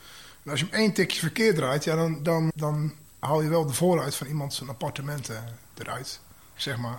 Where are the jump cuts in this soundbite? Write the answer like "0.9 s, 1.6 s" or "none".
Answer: 2.5 s